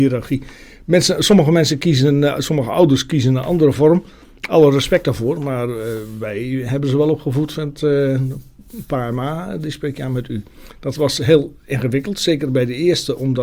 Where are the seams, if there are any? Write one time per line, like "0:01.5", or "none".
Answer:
none